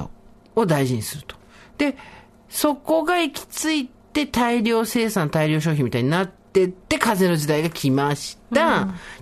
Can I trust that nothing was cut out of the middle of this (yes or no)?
yes